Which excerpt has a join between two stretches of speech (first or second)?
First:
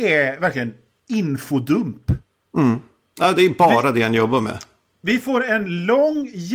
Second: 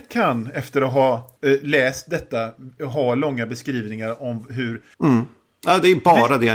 second